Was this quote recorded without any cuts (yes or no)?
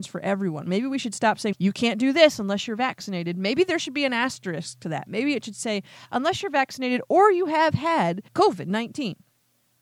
no